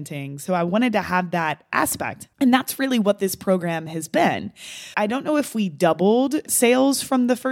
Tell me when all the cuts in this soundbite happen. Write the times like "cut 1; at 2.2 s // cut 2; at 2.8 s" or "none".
cut 1; at 2.3 s // cut 2; at 4.9 s